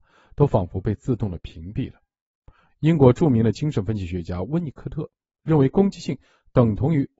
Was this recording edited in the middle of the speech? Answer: yes; 1 cut; at 2.7 s

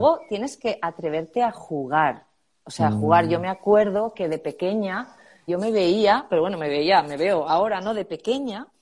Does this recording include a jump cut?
yes; 1 cut; at 5.5 s

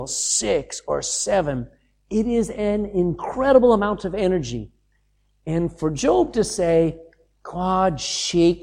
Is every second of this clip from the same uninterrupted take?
yes; 0 cuts

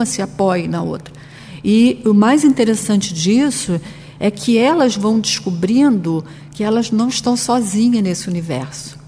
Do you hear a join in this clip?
no; 0 cuts

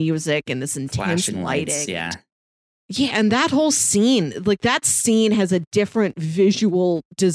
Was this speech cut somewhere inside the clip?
no; 0 cuts

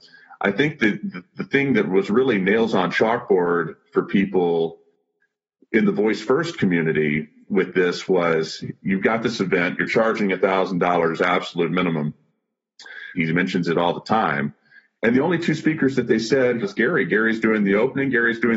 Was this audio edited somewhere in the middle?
yes; 3 cuts; at 13.1 s, 14.9 s, 16.6 s

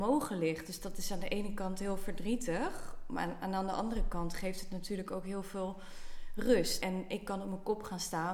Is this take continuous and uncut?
no; 1 cut; at 6.8 s

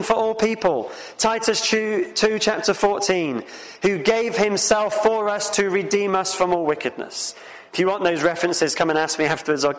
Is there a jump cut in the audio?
no; 0 cuts

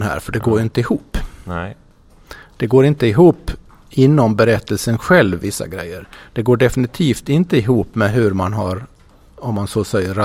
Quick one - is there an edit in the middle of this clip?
no; 0 cuts

